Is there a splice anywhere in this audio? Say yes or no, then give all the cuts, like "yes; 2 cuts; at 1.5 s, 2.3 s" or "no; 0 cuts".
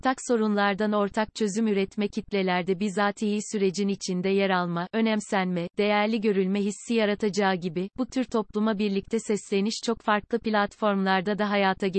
no; 0 cuts